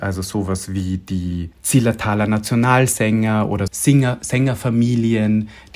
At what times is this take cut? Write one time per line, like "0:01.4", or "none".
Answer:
0:01.5
0:03.7